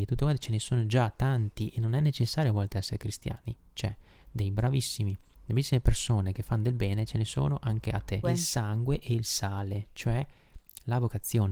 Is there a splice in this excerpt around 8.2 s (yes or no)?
yes